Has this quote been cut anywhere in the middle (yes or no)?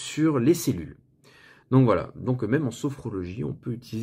no